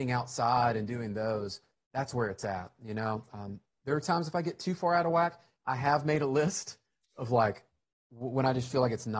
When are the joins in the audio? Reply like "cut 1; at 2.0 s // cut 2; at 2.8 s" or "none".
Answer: none